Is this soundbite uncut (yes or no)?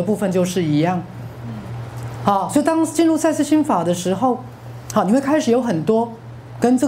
no